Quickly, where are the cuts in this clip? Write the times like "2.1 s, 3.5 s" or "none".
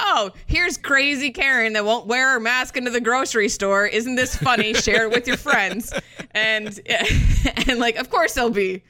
none

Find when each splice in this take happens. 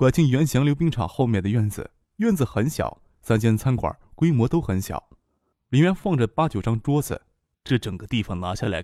5.5 s, 7.5 s

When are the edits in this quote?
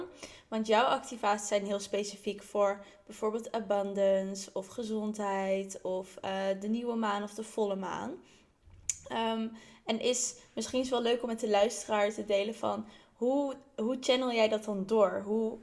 none

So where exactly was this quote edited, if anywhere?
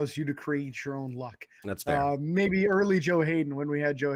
1.6 s

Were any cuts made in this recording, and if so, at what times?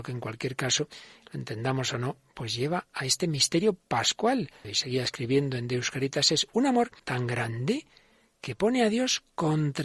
4.6 s, 7.0 s

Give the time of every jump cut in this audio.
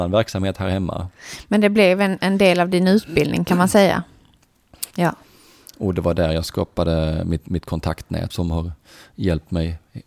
4.9 s, 8.3 s

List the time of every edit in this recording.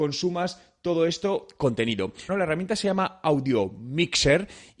2.3 s

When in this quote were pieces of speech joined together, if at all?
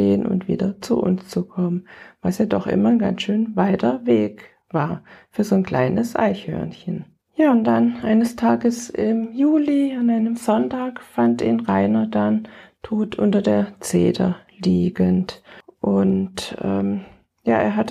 none

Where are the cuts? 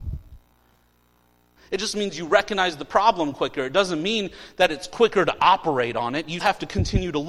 1.6 s, 6.4 s

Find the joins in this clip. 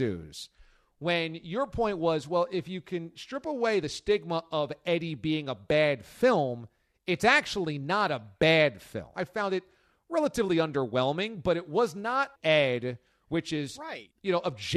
9.1 s, 12.4 s

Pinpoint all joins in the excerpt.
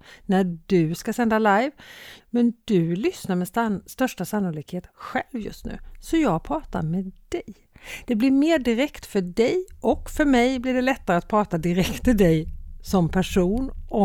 2.2 s

